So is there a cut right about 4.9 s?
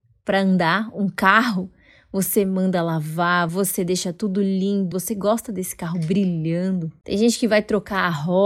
yes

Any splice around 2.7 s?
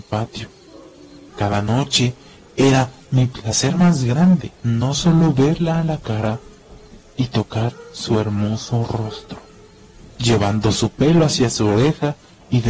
no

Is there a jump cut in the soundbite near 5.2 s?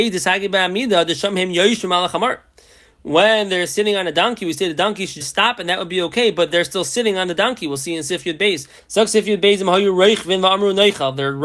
yes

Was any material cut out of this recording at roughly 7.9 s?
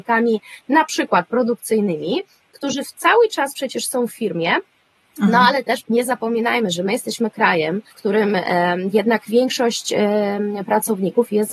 yes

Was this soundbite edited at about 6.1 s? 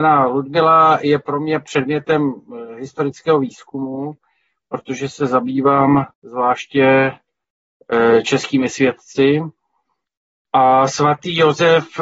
yes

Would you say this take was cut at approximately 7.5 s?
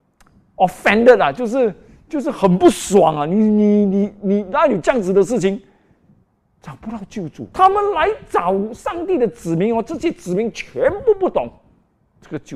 yes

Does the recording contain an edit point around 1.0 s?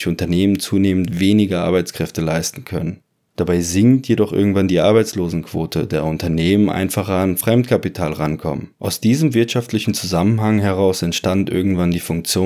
no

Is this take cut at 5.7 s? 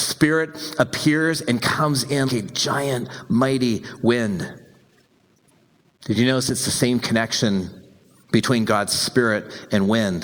no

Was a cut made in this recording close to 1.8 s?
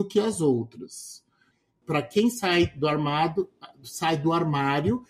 yes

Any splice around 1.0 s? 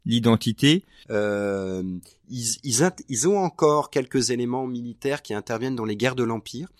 yes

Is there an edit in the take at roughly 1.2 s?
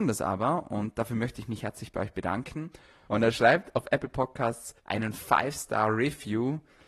no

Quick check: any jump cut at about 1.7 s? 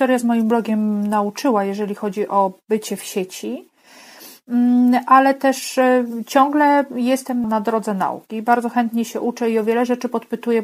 no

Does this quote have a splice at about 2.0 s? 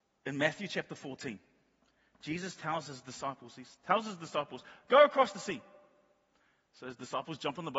no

